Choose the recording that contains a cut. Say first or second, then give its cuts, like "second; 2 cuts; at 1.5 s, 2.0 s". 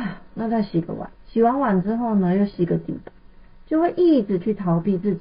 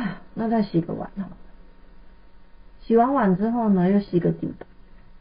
first; 1 cut; at 1.1 s